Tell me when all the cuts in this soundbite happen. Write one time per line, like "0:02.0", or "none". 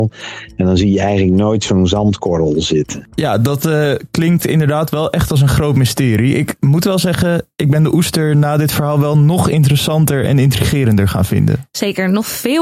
none